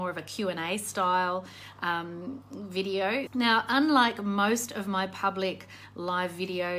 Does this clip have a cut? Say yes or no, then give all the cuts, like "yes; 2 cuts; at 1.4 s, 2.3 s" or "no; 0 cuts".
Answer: yes; 1 cut; at 3.3 s